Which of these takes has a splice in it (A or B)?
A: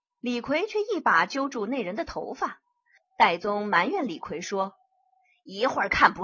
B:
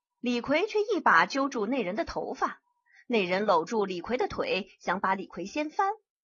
A